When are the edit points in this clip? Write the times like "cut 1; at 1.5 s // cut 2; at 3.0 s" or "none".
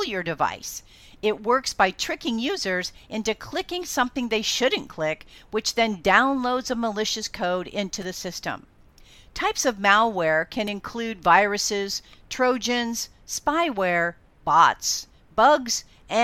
none